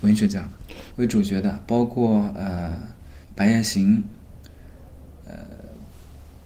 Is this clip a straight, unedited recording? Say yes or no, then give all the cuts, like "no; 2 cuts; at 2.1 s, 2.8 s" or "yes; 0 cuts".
no; 2 cuts; at 0.9 s, 3.2 s